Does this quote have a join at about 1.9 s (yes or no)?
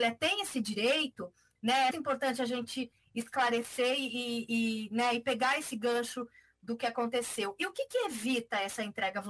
yes